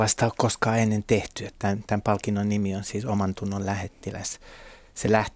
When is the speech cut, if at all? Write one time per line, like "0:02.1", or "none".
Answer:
0:01.5